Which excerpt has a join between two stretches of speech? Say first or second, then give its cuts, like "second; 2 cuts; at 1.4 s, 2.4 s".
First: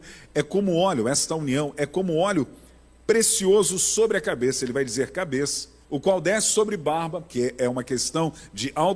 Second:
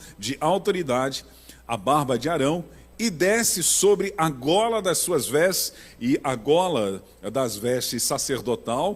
first; 2 cuts; at 5.8 s, 7.3 s